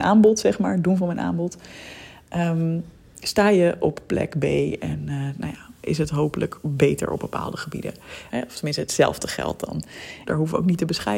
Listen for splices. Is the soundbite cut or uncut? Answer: cut